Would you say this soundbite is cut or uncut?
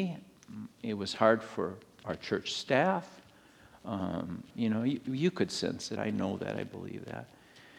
cut